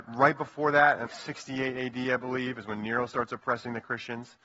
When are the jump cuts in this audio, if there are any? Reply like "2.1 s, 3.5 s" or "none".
1.1 s